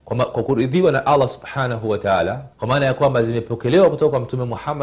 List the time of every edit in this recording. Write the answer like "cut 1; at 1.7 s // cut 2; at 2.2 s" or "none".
cut 1; at 2.5 s